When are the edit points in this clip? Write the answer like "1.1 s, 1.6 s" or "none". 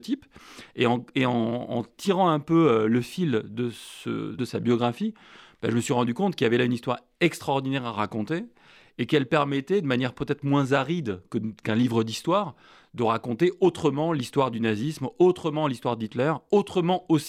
4.4 s